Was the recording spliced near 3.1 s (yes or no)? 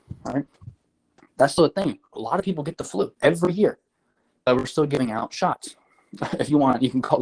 yes